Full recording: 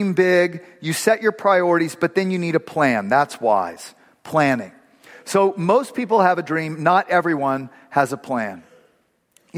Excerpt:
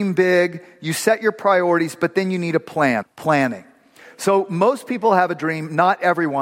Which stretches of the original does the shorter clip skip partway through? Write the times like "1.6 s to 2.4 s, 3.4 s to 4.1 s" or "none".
3.0 s to 4.1 s

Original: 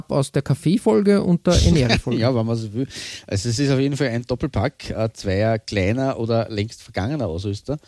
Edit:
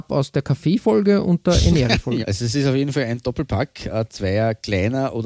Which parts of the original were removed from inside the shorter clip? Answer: 2.2 s to 3.2 s

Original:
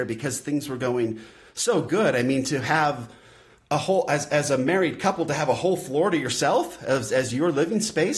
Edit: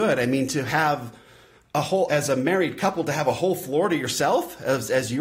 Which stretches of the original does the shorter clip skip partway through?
4.0 s to 4.3 s

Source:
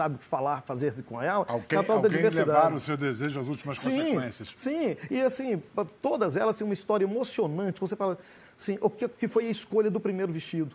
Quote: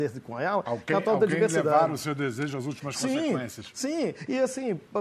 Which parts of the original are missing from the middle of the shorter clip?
none

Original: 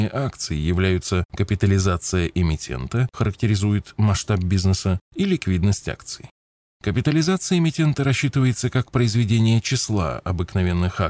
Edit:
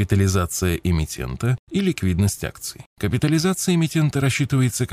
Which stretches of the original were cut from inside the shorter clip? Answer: 3.1 s to 5.0 s, 6.3 s to 6.7 s

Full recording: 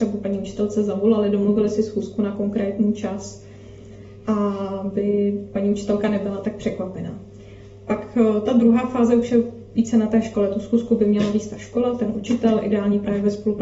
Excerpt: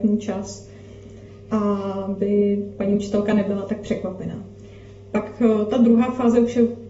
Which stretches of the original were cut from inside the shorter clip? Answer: none

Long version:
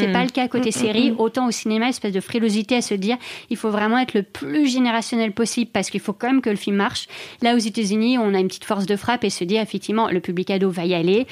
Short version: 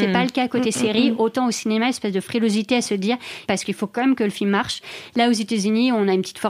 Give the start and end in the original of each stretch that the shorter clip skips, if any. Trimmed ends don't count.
3.5 s to 5.7 s

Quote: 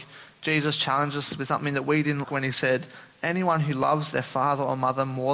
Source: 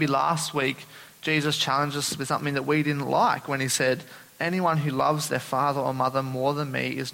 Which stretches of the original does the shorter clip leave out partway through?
3.0 s to 3.4 s

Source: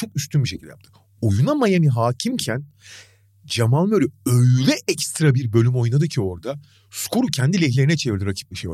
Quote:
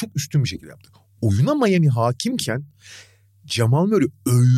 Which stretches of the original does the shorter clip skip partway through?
none

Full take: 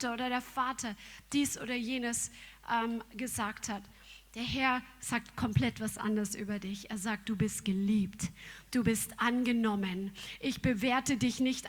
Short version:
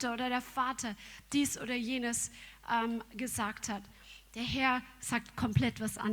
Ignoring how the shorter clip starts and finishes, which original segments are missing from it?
none

